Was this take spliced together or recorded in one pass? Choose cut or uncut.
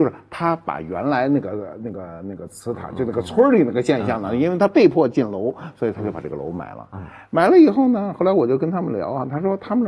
uncut